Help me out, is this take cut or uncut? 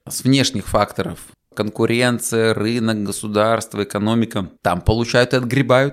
cut